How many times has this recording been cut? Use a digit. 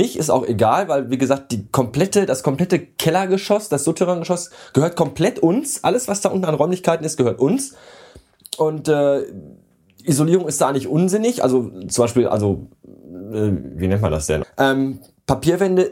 1